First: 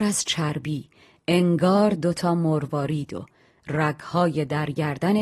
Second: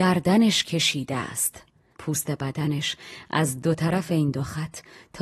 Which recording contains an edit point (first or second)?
second